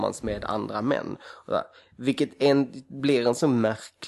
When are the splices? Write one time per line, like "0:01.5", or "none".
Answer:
none